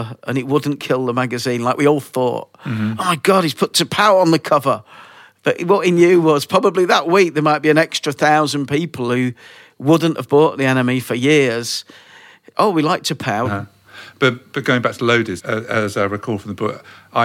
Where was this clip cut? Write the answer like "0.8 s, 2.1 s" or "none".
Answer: 13.4 s, 15.4 s